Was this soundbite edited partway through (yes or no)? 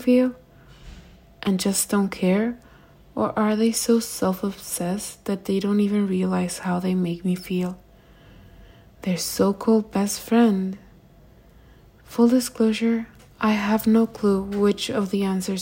no